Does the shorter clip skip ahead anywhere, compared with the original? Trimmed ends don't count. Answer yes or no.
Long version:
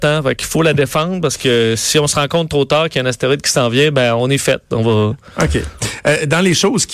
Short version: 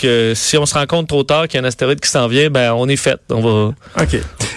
no